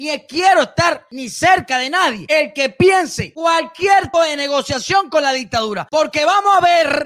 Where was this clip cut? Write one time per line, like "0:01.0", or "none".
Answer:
0:04.1